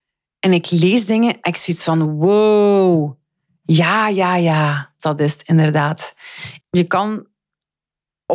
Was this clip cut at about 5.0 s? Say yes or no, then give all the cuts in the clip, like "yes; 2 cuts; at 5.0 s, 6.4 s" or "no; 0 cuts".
yes; 2 cuts; at 5.0 s, 6.6 s